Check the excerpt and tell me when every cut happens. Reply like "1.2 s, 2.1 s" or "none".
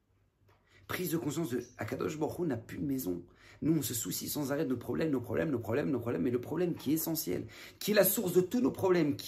5.8 s